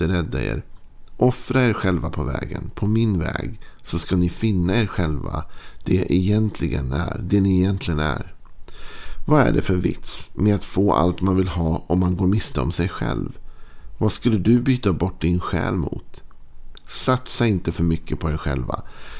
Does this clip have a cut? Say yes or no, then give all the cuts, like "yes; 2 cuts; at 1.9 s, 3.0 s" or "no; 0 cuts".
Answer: no; 0 cuts